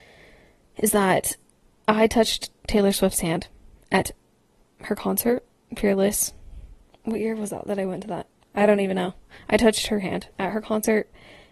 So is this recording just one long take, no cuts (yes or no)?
yes